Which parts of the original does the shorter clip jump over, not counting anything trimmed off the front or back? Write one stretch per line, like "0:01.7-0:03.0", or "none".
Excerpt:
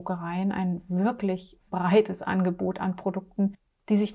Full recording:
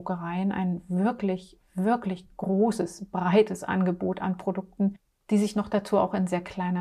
0:01.7-0:03.1